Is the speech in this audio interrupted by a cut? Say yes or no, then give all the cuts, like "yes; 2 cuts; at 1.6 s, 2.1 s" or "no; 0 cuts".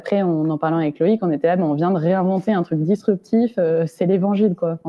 no; 0 cuts